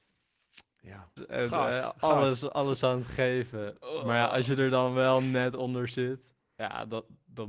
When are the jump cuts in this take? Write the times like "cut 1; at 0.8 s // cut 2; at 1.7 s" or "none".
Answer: cut 1; at 1.2 s